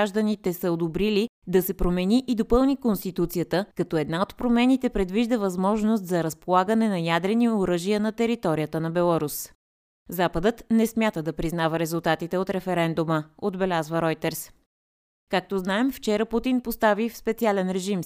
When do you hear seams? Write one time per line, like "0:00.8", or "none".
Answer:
0:03.7